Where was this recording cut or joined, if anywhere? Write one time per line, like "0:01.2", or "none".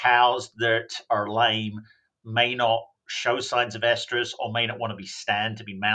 none